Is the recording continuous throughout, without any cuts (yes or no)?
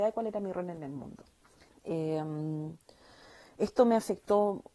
no